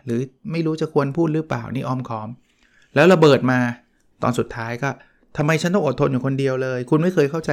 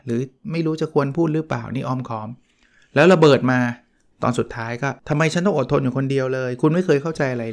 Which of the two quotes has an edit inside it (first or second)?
second